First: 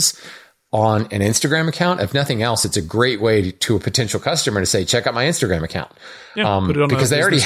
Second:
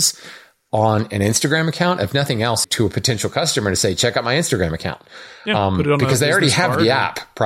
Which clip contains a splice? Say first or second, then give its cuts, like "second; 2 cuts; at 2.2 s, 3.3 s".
second; 1 cut; at 2.6 s